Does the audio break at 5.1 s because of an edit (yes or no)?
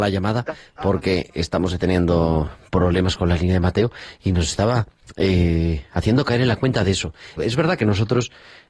no